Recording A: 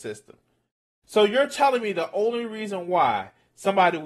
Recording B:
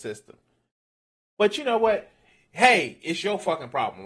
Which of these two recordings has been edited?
A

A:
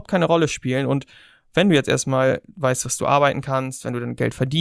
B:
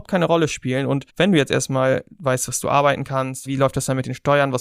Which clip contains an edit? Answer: B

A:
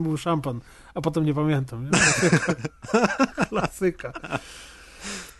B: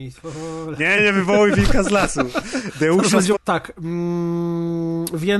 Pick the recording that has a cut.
B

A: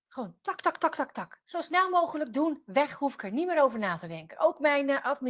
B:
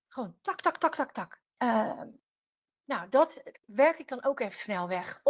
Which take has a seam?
B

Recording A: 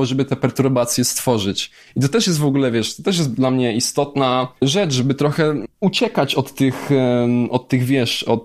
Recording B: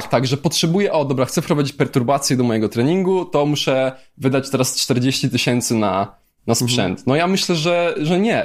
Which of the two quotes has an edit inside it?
A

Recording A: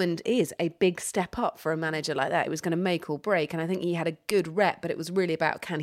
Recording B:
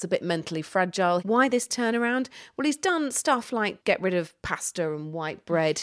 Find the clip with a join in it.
B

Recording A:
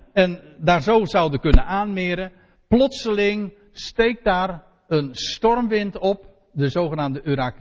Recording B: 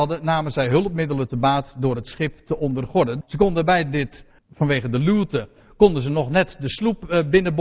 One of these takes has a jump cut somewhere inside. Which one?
B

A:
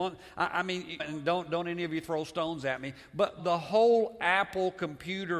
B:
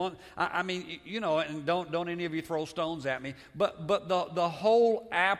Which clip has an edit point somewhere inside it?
A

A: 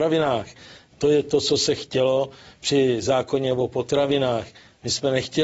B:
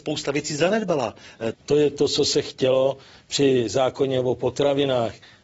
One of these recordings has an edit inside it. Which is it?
B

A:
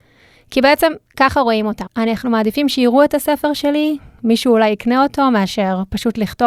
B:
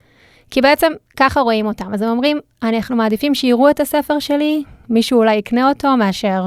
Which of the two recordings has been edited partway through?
A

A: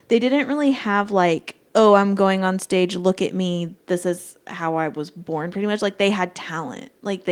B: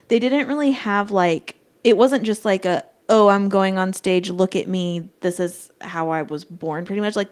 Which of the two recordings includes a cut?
A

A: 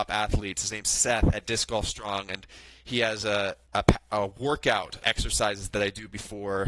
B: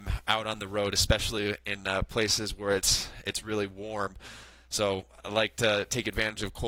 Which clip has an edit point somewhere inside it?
A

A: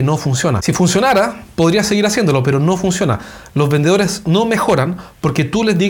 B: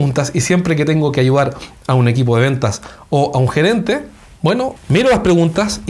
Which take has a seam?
B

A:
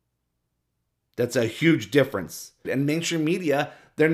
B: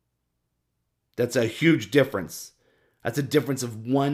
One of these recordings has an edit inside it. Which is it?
A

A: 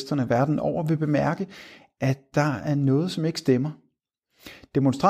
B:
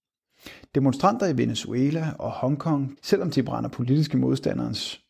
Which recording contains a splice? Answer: B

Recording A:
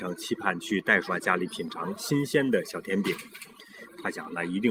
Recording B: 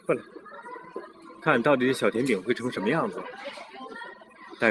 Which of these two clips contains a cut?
A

